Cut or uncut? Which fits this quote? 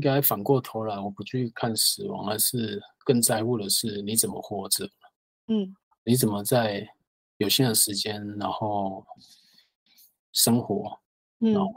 uncut